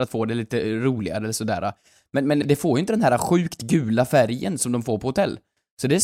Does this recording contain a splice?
yes; 1 cut; at 2.4 s

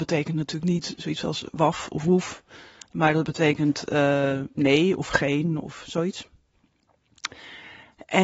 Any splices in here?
no; 0 cuts

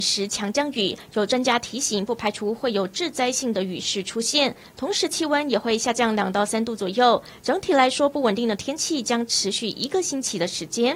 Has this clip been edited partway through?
no; 0 cuts

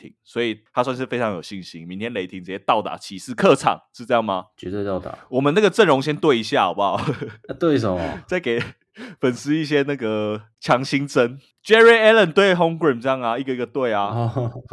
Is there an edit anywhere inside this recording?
no; 0 cuts

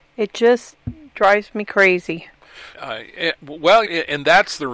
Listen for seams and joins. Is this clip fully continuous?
no; 2 cuts; at 2.7 s, 3.9 s

